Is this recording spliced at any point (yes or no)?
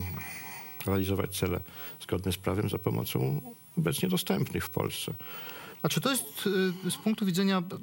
yes